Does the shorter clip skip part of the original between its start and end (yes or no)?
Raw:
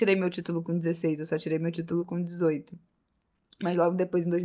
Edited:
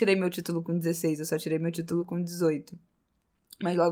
no